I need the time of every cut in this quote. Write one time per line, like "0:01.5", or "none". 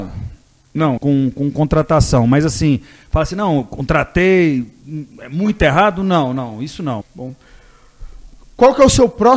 0:01.0
0:07.0